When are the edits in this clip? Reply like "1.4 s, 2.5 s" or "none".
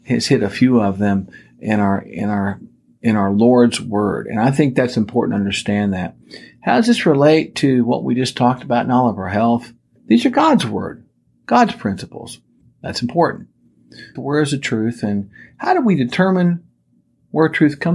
10.0 s, 12.6 s, 14.2 s